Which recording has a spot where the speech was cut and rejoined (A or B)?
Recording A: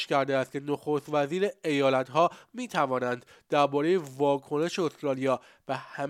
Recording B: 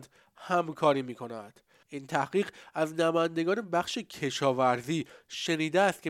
B